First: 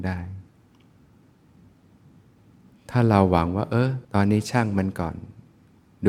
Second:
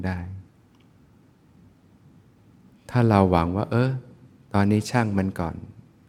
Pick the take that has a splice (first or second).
first